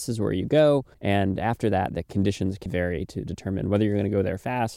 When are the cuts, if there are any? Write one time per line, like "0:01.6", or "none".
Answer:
0:00.9
0:02.7